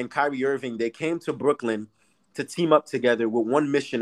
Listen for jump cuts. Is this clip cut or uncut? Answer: uncut